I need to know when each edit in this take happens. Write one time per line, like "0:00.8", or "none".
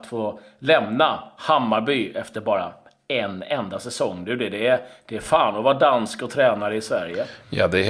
none